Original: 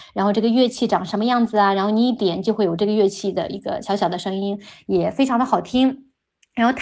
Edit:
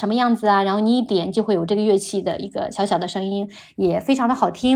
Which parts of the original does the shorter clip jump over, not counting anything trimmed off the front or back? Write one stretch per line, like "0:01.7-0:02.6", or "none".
none